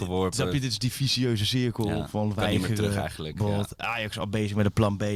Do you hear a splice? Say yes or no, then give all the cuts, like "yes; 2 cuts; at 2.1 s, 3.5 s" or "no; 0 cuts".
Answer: no; 0 cuts